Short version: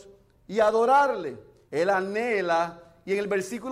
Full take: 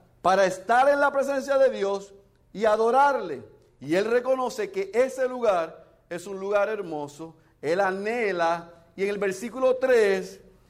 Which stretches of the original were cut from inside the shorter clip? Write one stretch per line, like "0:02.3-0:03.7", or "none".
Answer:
0:03.7-0:07.6

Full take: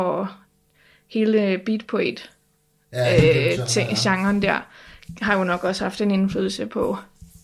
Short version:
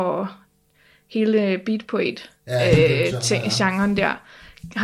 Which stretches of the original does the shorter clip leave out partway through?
0:02.4-0:02.8

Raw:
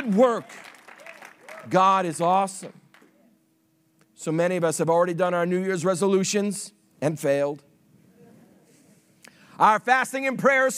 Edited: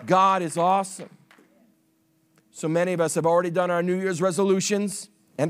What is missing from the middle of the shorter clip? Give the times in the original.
none

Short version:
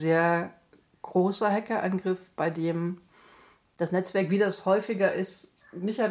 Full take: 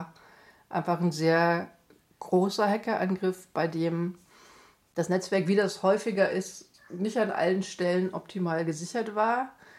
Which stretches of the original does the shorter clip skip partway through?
none

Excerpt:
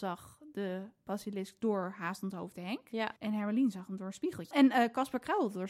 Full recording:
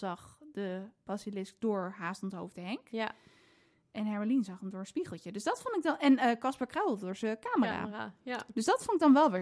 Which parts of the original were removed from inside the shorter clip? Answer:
0:03.2-0:03.9
0:05.2-0:06.0

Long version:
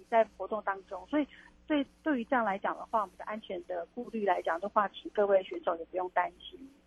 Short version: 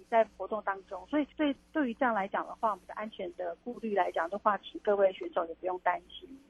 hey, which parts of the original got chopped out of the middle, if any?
0:01.3-0:01.6

